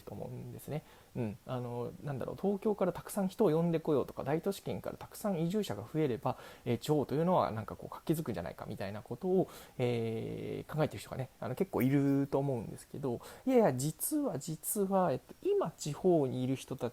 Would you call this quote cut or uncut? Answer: uncut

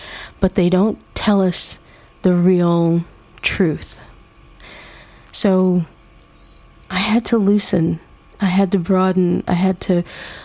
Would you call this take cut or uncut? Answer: uncut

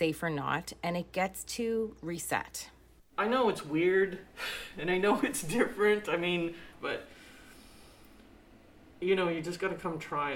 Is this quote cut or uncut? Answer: cut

